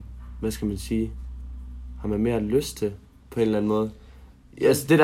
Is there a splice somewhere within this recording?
no; 0 cuts

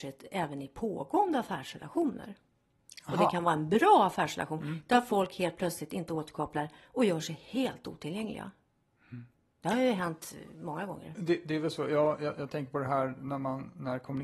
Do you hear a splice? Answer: no; 0 cuts

